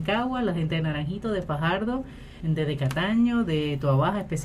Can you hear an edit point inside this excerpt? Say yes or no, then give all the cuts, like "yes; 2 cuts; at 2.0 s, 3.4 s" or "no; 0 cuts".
yes; 1 cut; at 2.4 s